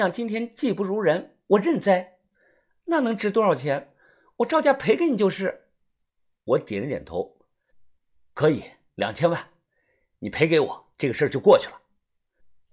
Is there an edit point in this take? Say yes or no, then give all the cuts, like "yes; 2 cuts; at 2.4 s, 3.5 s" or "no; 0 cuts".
yes; 1 cut; at 2.8 s